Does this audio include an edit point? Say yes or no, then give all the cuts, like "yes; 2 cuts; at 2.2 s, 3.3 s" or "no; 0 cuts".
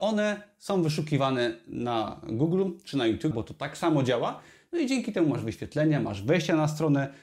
yes; 1 cut; at 3.3 s